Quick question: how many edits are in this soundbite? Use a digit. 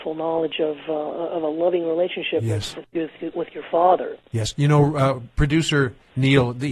0